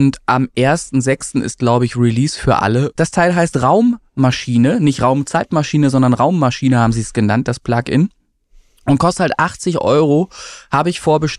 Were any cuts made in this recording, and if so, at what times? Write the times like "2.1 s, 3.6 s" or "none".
3.0 s